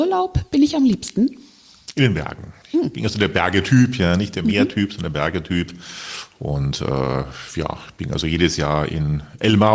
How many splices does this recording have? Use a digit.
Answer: 1